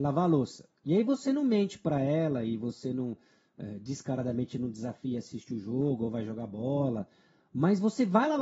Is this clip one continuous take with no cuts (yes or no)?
yes